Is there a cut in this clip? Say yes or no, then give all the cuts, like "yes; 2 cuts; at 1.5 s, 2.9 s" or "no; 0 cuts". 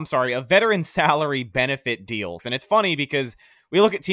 yes; 1 cut; at 2.4 s